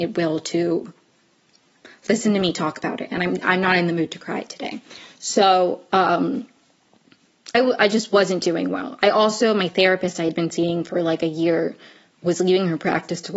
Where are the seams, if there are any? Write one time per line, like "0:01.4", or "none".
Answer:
0:07.5